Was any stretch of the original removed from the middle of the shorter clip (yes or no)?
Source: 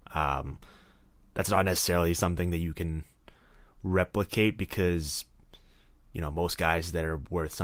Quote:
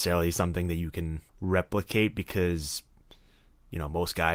yes